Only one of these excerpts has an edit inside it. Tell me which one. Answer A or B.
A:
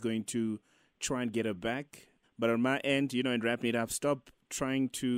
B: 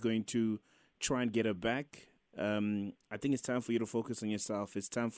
A